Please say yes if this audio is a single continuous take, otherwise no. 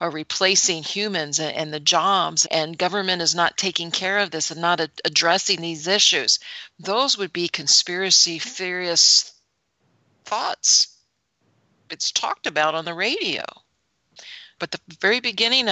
no